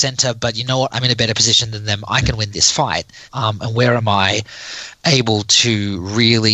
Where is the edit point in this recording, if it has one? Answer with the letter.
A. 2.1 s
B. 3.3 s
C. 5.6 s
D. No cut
B